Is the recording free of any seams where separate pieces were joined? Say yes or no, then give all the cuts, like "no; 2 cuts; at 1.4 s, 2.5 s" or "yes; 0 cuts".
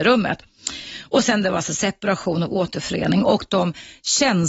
yes; 0 cuts